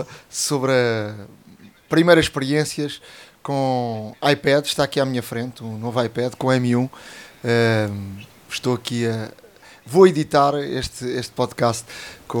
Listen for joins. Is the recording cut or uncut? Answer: uncut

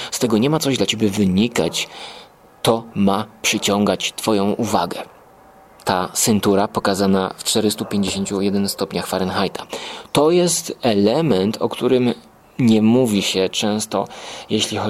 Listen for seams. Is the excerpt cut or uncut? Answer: uncut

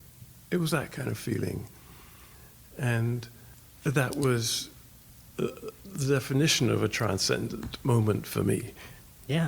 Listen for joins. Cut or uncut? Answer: uncut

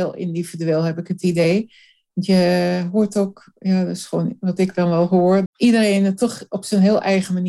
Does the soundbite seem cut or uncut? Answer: cut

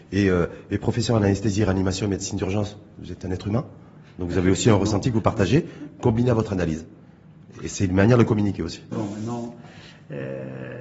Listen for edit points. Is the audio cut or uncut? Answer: cut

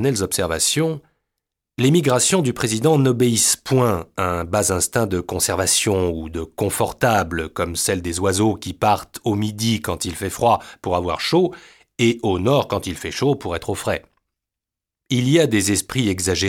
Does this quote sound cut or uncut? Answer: uncut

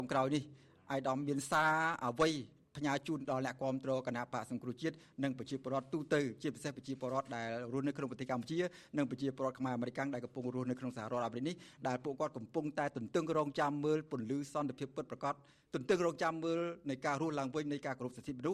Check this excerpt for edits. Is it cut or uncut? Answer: uncut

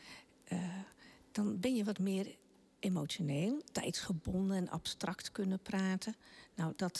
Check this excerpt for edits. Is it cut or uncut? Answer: cut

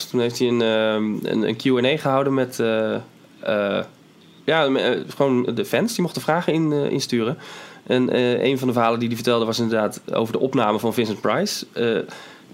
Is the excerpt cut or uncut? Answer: uncut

